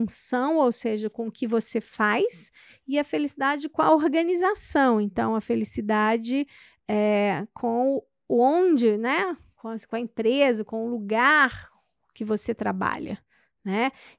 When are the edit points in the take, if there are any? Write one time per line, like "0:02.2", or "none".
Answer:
none